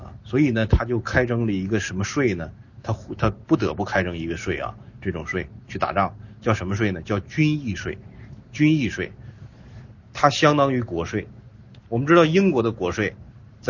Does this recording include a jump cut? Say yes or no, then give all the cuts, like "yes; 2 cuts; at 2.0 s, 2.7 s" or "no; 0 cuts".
no; 0 cuts